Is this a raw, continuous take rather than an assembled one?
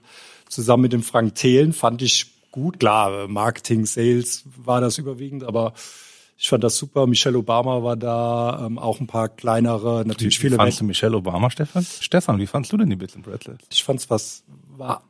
no; 2 cuts; at 12.0 s, 13.7 s

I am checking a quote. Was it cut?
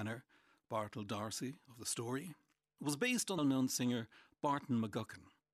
yes; 1 cut; at 3.4 s

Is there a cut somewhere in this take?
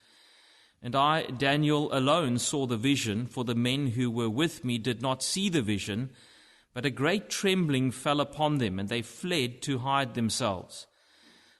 no; 0 cuts

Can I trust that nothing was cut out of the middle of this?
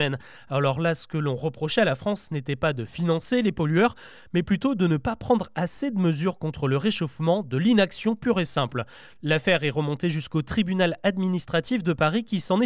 yes; 0 cuts

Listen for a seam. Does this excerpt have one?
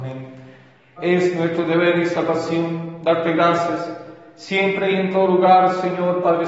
yes; 1 cut; at 1.0 s

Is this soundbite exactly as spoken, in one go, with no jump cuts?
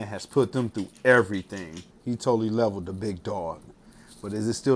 no; 1 cut; at 1.9 s

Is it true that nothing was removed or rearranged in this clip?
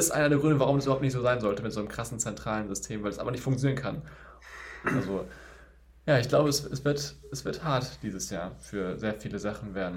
no; 1 cut; at 4.8 s

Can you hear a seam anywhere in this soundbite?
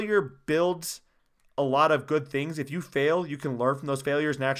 no; 0 cuts

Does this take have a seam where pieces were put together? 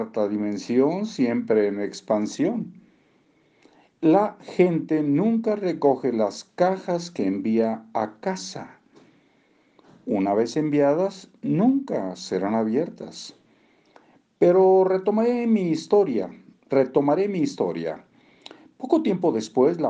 no; 0 cuts

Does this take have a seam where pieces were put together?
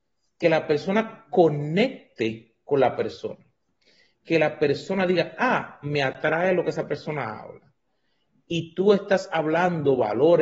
no; 0 cuts

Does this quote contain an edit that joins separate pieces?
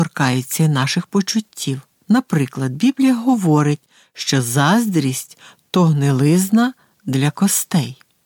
no; 0 cuts

